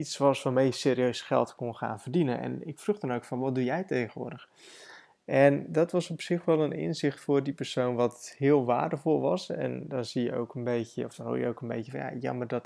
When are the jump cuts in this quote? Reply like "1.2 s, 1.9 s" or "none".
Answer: 5.1 s